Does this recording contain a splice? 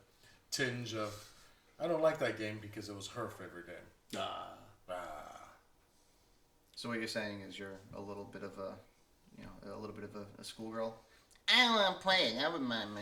no; 0 cuts

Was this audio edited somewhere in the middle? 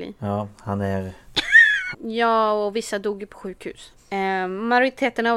yes; 2 cuts; at 1.9 s, 4.0 s

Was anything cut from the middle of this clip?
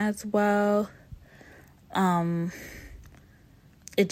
no; 0 cuts

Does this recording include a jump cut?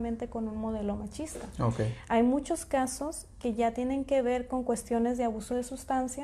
no; 0 cuts

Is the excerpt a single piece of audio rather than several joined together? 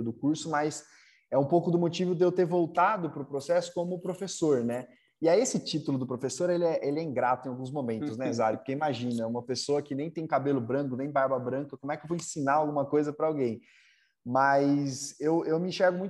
yes; 0 cuts

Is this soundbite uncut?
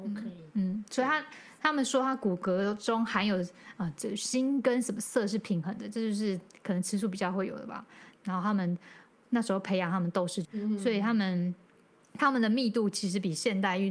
no; 2 cuts; at 8.1 s, 10.4 s

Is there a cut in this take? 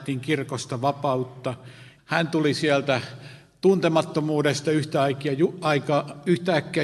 yes; 1 cut; at 2.0 s

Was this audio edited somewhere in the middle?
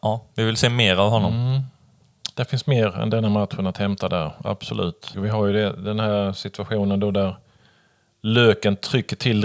yes; 1 cut; at 5.1 s

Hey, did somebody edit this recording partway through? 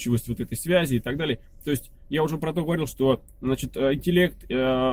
no; 0 cuts

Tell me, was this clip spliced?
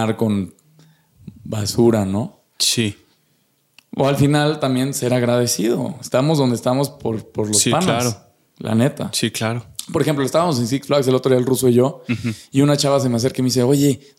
no; 0 cuts

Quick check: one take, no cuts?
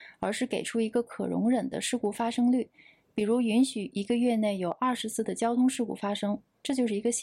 yes; 0 cuts

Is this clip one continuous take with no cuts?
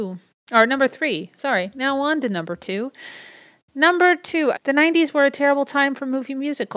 no; 1 cut; at 4.5 s

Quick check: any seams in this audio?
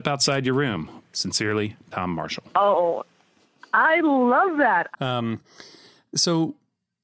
yes; 2 cuts; at 1.0 s, 4.9 s

